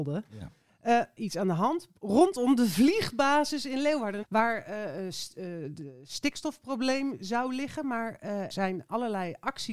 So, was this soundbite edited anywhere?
yes; 3 cuts; at 1.2 s, 4.2 s, 8.5 s

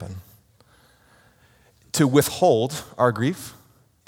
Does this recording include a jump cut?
no; 0 cuts

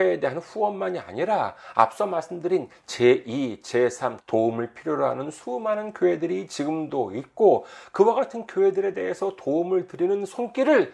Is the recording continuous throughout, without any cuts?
no; 1 cut; at 4.2 s

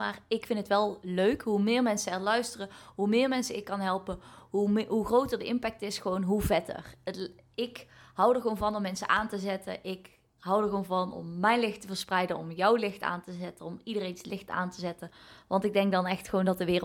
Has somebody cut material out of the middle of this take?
no; 0 cuts

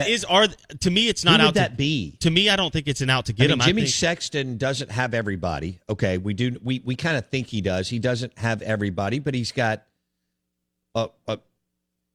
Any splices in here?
no; 0 cuts

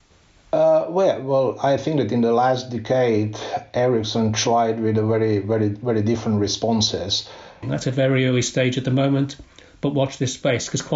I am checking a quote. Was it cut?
yes; 1 cut; at 7.6 s

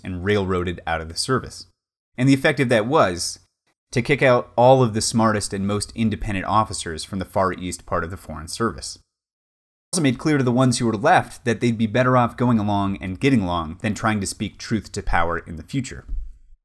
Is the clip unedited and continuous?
no; 2 cuts; at 3.7 s, 9.9 s

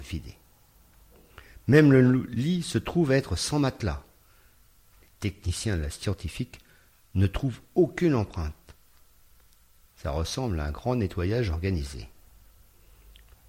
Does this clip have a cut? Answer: no; 0 cuts

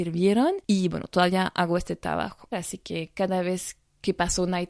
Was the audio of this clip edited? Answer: yes; 1 cut; at 2.5 s

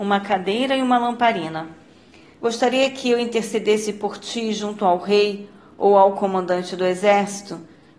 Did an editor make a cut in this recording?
yes; 1 cut; at 2.4 s

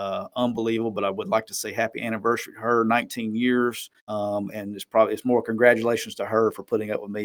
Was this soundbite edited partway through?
yes; 1 cut; at 4.0 s

